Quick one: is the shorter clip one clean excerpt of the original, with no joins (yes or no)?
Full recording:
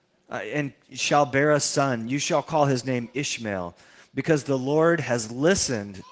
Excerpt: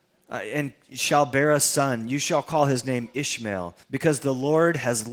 no